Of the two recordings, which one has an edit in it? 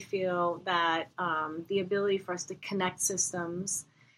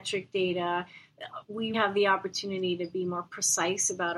second; 1 cut; at 1.7 s

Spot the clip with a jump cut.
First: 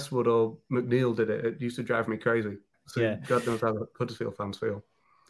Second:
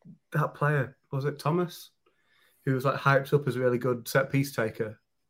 first; 1 cut; at 2.7 s

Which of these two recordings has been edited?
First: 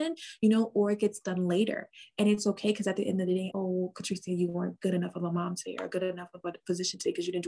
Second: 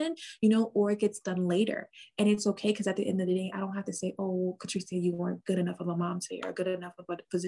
first; 1 cut; at 3.5 s

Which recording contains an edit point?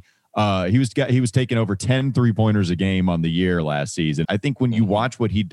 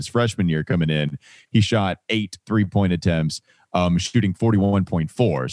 first; 1 cut; at 4.2 s

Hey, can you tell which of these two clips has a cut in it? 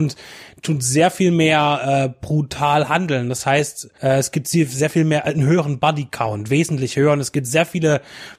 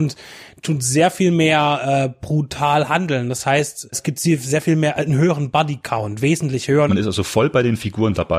second; 2 cuts; at 3.9 s, 6.9 s

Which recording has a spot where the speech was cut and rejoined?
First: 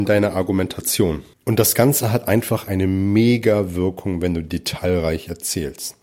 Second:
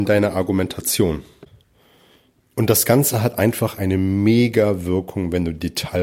first; 1 cut; at 1.3 s

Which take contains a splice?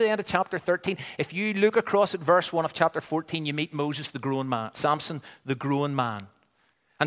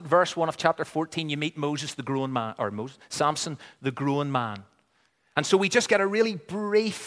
first; 1 cut; at 4.7 s

